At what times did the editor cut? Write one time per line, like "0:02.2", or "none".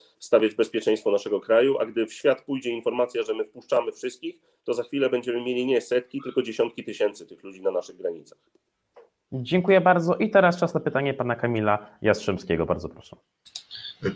none